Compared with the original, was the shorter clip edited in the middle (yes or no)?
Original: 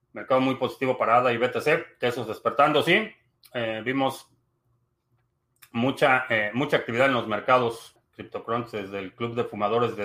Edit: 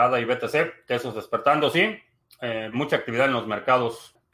yes